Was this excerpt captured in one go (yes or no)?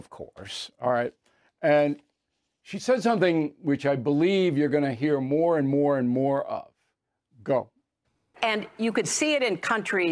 no